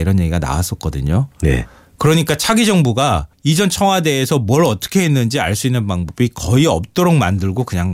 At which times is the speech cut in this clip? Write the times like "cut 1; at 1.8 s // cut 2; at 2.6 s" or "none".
cut 1; at 3.3 s